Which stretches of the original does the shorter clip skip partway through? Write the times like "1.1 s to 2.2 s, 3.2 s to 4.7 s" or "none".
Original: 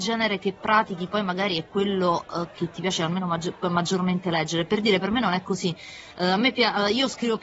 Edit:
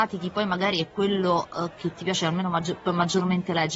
none